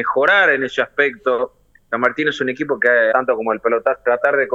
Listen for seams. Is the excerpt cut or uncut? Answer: cut